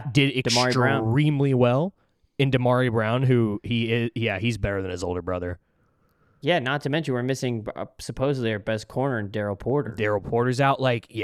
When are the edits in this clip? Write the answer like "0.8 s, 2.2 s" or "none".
none